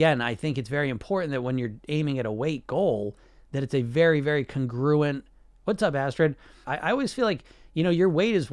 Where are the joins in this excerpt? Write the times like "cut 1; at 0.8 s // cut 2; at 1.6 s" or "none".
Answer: cut 1; at 6.6 s